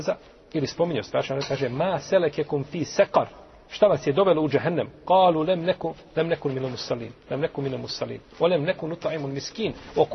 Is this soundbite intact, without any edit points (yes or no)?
yes